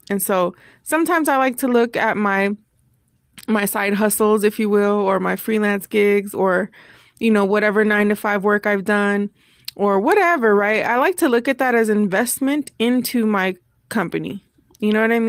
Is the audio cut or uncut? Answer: uncut